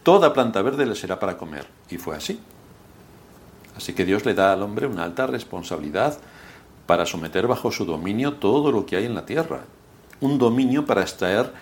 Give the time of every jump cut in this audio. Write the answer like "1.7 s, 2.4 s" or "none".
none